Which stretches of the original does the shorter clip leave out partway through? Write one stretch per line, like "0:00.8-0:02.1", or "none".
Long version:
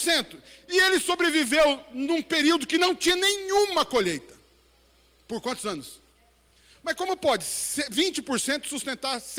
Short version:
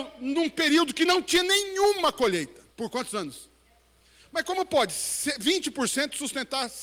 0:04.4-0:05.2